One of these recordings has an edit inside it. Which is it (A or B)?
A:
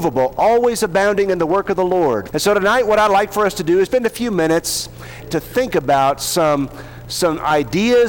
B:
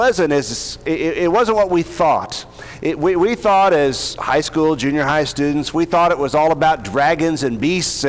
A